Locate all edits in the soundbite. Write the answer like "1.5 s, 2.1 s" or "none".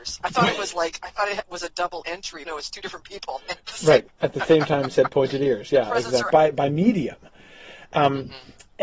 2.5 s, 4.1 s, 6.3 s